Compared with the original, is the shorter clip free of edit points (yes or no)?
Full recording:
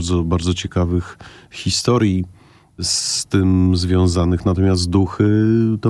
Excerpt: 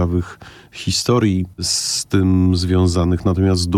no